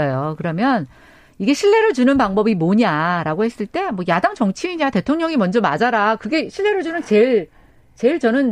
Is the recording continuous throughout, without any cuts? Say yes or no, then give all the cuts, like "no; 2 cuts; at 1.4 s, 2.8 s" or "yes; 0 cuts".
yes; 0 cuts